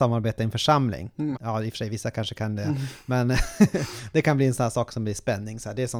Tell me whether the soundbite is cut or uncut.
cut